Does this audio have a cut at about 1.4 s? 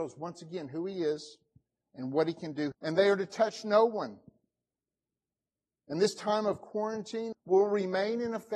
no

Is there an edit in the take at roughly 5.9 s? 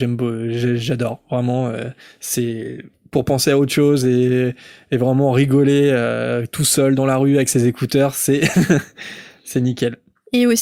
no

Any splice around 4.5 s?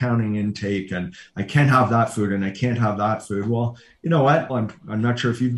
yes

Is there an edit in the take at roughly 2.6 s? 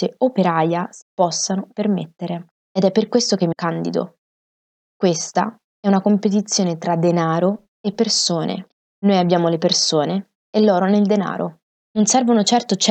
no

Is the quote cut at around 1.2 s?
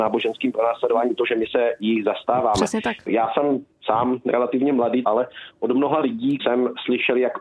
no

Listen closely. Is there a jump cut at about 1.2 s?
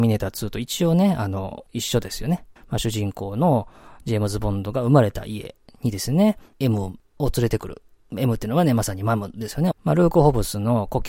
no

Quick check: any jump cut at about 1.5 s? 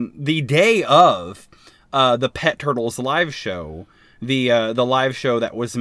no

